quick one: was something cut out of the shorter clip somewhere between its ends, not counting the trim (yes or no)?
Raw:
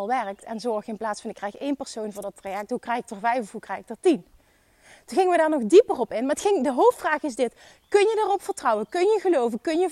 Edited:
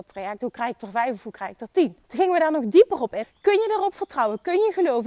yes